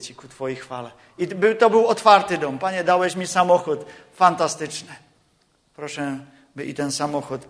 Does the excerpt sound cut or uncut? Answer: uncut